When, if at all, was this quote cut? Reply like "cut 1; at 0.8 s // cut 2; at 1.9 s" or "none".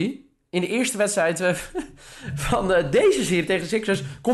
none